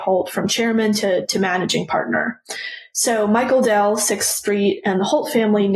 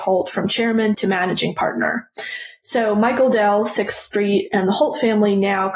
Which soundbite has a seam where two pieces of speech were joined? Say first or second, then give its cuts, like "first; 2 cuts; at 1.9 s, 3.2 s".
second; 1 cut; at 0.9 s